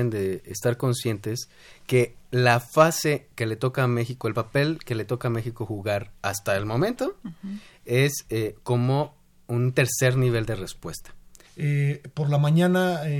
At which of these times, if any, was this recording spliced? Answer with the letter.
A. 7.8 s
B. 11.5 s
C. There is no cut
B